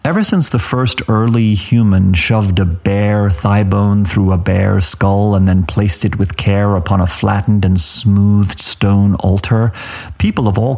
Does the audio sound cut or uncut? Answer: uncut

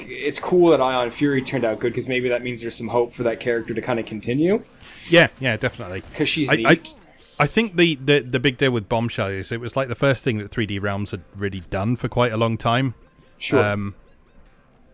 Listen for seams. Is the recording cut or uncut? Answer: uncut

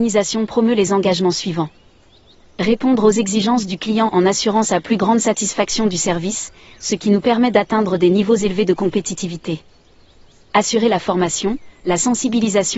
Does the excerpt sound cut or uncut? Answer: uncut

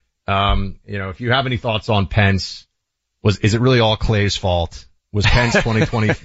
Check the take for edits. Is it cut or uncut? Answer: uncut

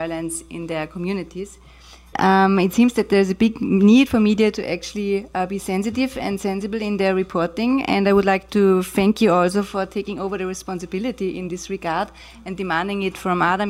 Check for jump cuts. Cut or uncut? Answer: cut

